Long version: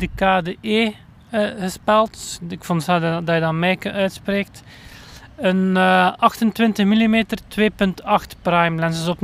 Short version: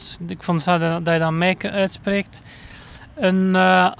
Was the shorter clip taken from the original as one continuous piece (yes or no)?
yes